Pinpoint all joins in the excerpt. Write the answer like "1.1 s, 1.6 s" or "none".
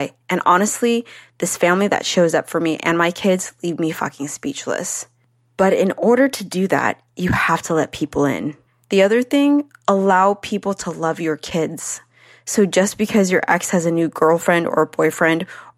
8.7 s